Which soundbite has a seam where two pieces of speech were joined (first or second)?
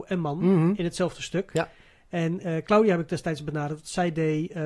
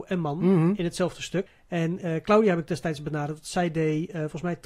second